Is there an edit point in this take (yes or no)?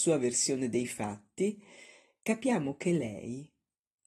no